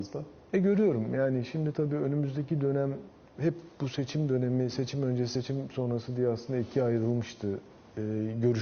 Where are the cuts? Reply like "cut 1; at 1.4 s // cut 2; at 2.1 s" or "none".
none